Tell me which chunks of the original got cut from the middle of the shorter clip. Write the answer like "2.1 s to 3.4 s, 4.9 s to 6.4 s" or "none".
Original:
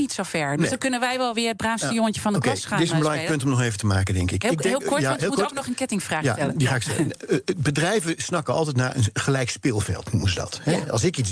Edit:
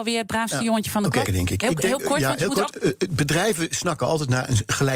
2.6 s to 4.1 s, 5.5 s to 7.2 s